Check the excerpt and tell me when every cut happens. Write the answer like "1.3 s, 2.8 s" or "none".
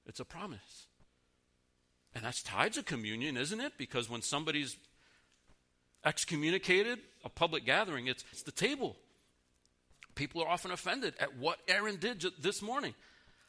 7.2 s, 8.3 s